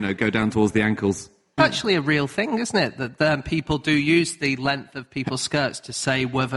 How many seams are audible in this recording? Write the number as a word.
one